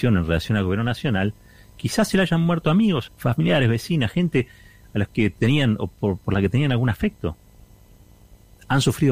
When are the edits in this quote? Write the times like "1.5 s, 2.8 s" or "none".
3.1 s